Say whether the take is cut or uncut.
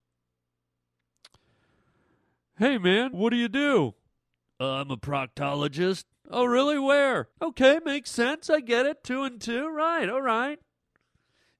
cut